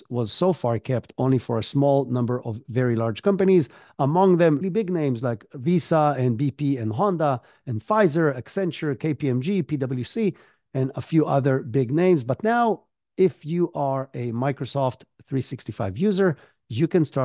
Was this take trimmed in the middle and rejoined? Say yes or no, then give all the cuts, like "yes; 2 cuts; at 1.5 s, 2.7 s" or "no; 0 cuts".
yes; 1 cut; at 4.6 s